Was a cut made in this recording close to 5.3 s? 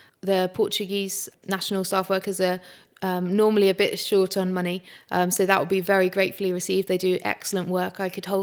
no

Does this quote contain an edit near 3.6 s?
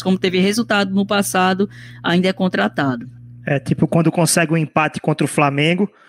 no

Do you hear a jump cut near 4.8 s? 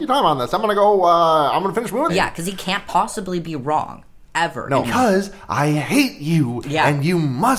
yes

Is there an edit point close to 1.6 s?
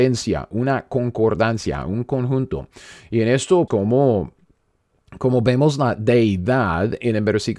no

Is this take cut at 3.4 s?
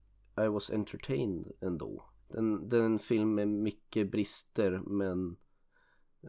no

